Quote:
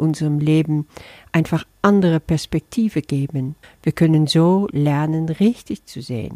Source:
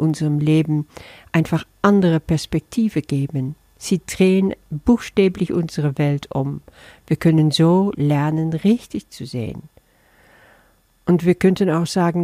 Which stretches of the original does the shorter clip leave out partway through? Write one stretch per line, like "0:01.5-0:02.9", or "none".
0:03.6-0:06.9